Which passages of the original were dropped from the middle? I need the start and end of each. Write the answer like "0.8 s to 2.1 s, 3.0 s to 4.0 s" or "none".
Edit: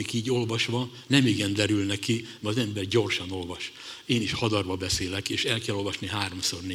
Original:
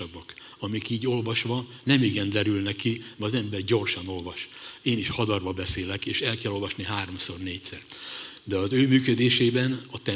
none